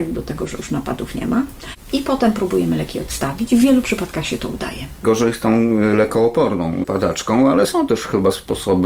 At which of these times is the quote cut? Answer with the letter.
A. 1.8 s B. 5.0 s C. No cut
B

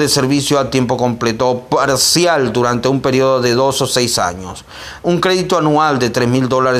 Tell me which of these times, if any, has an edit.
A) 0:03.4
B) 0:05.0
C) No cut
B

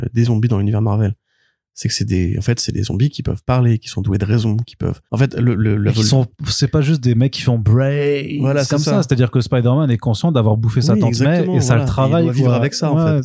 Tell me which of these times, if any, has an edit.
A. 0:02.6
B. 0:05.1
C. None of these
B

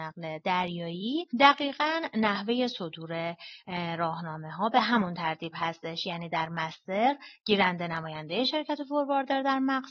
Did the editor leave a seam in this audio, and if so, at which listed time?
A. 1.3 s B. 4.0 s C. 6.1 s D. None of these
A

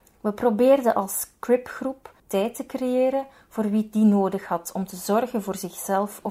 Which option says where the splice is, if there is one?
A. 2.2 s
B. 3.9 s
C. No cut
A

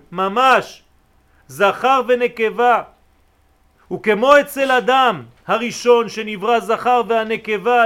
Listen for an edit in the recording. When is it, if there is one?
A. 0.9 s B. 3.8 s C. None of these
C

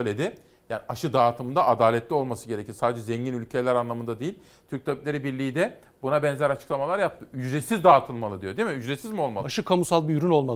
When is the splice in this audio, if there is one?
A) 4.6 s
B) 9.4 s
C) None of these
B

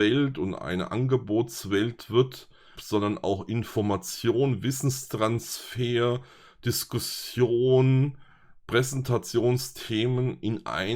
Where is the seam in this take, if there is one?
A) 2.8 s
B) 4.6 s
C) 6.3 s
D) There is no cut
A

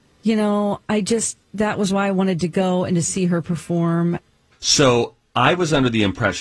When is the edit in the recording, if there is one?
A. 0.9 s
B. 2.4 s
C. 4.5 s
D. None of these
C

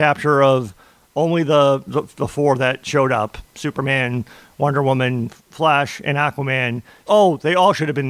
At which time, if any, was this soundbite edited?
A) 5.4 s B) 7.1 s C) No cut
B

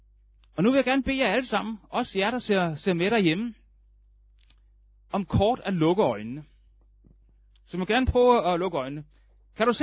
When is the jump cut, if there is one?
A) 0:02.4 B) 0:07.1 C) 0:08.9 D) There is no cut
D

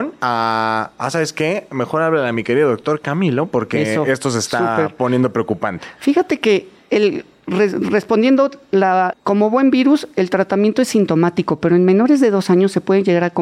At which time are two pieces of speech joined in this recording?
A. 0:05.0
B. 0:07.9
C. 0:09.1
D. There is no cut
C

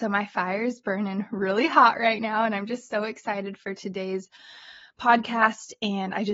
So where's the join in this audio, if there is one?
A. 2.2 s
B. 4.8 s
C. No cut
C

